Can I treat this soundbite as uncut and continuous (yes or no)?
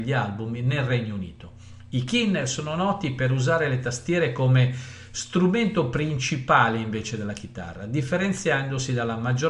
yes